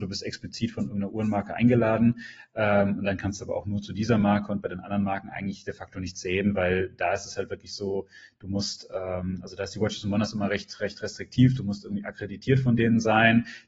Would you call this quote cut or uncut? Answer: uncut